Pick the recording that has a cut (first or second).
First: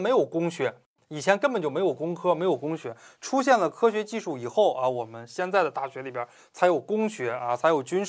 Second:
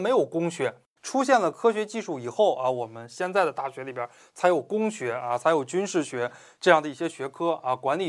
second